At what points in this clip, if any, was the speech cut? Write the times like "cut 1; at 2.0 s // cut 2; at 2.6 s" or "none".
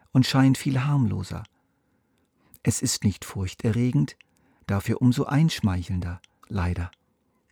cut 1; at 6.4 s